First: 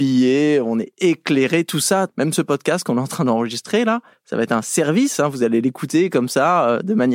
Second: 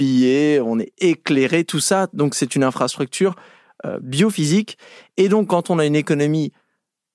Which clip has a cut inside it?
first; 2 cuts; at 2.1 s, 4.1 s

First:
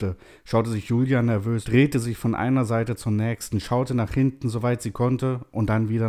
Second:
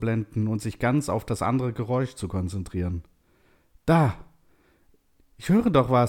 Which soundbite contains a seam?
first; 1 cut; at 1.6 s

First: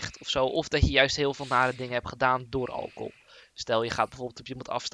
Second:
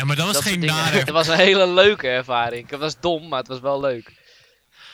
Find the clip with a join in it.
second; 1 cut; at 1.1 s

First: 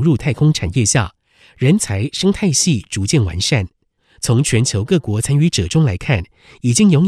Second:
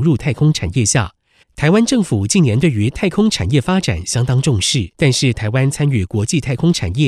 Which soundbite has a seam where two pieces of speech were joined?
second; 2 cuts; at 1.4 s, 4.9 s

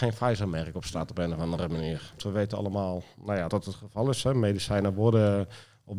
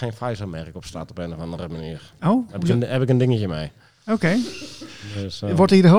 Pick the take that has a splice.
first; 2 cuts; at 2.2 s, 3.5 s

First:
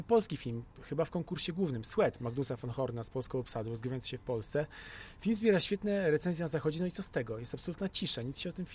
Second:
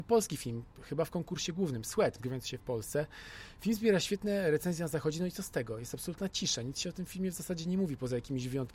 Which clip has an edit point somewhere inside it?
second; 1 cut; at 2.2 s

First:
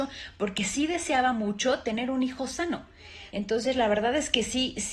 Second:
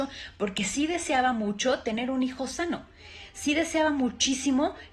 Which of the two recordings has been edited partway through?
first; 1 cut; at 3.3 s

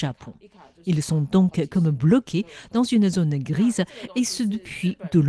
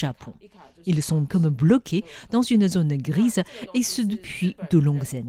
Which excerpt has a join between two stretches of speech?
second; 1 cut; at 1.3 s

